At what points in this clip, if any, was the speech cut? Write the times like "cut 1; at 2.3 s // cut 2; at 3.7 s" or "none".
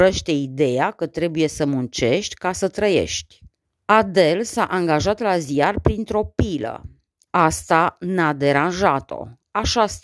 cut 1; at 3.6 s // cut 2; at 7.3 s